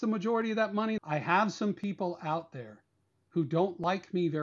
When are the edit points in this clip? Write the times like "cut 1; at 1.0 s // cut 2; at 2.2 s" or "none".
cut 1; at 1.0 s